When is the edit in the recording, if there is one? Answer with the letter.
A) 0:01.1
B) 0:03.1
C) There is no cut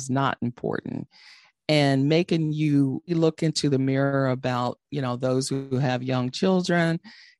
B